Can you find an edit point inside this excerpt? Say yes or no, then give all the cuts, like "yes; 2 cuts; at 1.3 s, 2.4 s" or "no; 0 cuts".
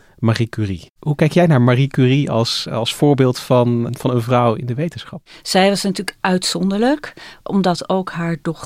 yes; 2 cuts; at 3.9 s, 7.4 s